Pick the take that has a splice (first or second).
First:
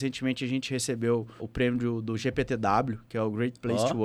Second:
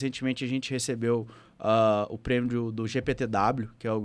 first